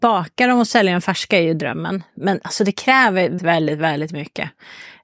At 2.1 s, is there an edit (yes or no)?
no